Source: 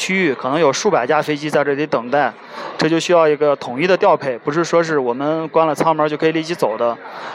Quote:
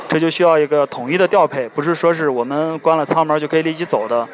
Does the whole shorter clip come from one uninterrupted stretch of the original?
yes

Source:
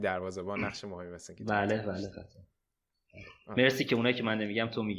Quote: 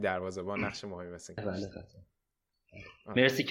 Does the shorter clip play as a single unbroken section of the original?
no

